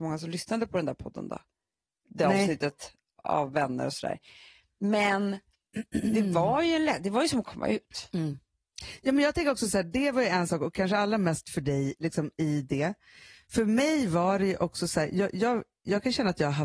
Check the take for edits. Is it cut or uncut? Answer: uncut